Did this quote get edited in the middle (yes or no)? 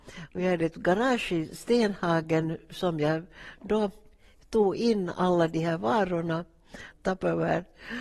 yes